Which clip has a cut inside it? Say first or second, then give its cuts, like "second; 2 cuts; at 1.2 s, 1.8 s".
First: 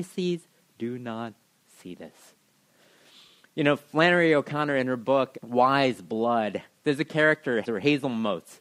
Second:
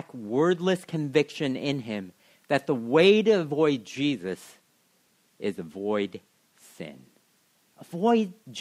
first; 2 cuts; at 5.3 s, 7.6 s